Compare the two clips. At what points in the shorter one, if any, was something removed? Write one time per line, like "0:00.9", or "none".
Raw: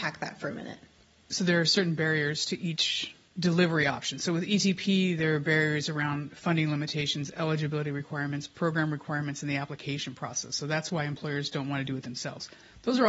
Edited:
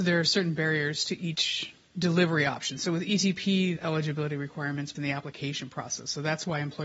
0:03.8
0:05.0